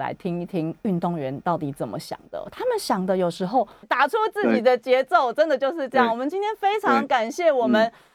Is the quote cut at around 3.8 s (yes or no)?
yes